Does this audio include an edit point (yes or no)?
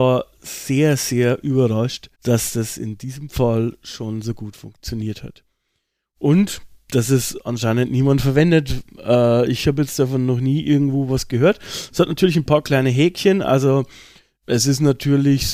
yes